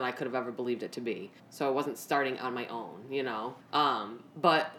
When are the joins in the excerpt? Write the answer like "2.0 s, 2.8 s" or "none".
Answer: 1.4 s, 3.6 s